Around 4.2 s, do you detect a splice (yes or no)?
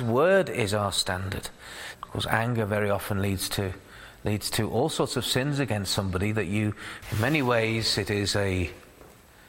no